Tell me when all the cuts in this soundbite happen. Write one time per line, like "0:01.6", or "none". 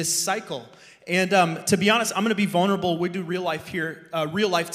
none

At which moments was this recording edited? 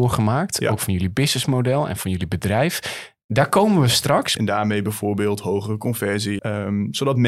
0:04.4
0:06.4

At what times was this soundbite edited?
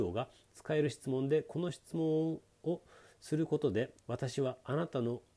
0:04.0

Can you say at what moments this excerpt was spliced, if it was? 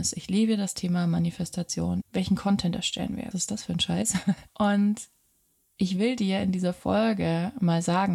0:02.0
0:03.3
0:04.5

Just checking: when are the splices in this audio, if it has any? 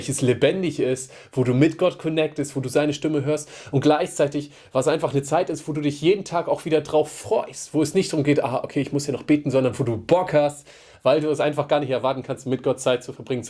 0:02.5

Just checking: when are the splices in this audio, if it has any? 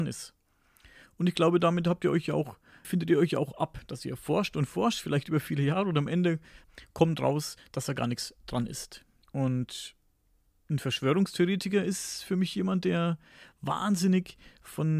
0:02.8

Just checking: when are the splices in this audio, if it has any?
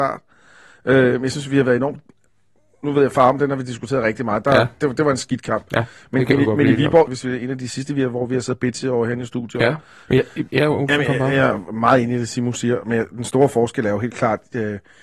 0:07.1
0:10.1

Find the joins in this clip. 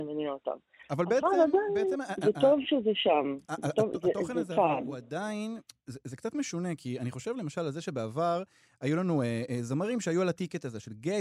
none

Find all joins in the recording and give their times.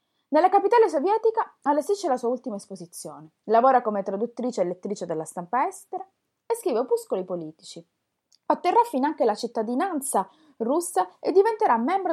none

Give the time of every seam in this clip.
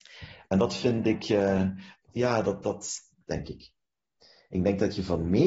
0:03.3

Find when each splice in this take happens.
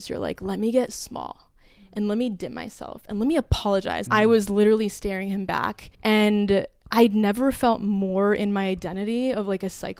0:04.1
0:05.9

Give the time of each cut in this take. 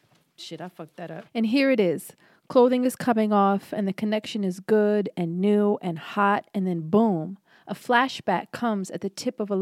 0:01.3

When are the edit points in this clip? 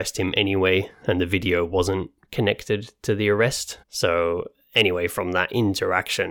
0:03.8

